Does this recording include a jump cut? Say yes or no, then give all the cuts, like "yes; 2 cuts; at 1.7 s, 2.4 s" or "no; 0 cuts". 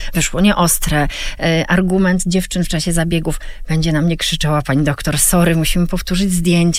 no; 0 cuts